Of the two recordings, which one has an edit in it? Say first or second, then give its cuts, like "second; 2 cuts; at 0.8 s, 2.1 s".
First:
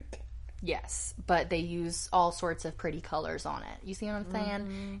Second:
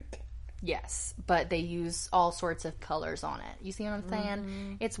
second; 1 cut; at 2.8 s